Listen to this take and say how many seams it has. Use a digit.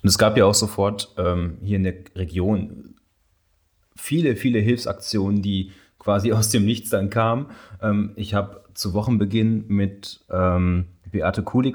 0